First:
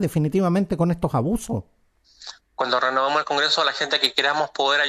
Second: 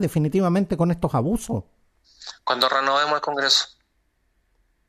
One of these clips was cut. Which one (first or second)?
first